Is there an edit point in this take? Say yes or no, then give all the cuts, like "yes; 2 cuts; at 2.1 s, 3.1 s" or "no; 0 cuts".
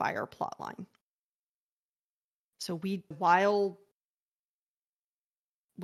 yes; 1 cut; at 3.1 s